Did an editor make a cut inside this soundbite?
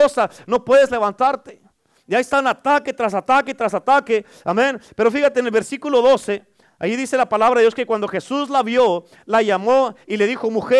no; 0 cuts

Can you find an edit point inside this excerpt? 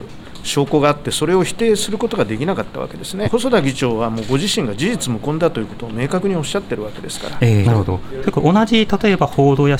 yes; 2 cuts; at 3.2 s, 7.6 s

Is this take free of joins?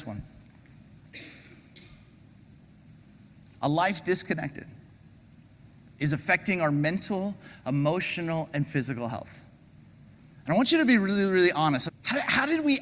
no; 2 cuts; at 10.3 s, 11.9 s

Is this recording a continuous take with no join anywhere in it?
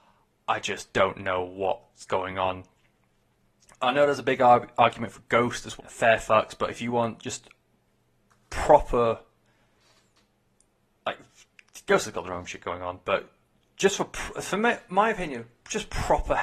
no; 1 cut; at 5.8 s

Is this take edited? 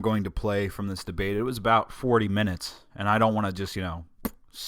no; 0 cuts

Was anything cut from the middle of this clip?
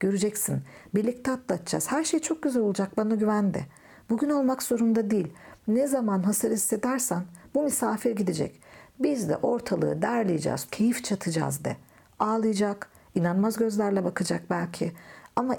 yes; 1 cut; at 10.7 s

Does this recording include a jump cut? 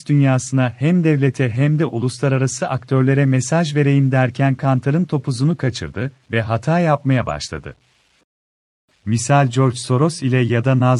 yes; 1 cut; at 8.9 s

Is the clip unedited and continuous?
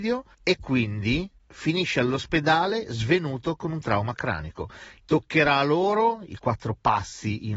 no; 1 cut; at 5.0 s

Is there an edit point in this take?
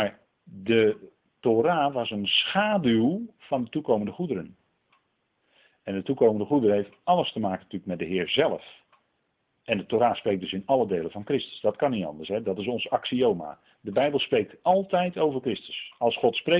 no; 0 cuts

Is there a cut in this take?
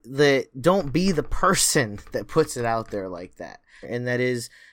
yes; 1 cut; at 3.8 s

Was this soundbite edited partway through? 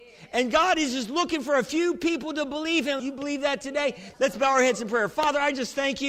yes; 2 cuts; at 3.0 s, 4.1 s

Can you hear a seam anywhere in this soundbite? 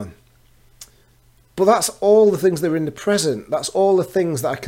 no; 0 cuts

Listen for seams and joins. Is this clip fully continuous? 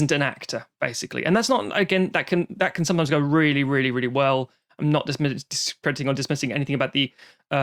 yes; 0 cuts

